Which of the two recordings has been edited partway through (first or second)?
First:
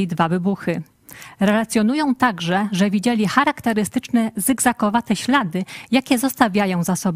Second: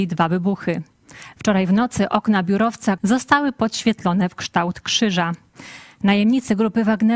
second